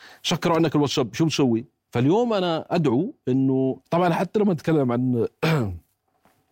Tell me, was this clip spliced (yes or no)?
yes